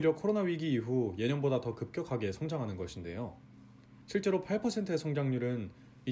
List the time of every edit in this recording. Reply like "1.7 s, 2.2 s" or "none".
4.0 s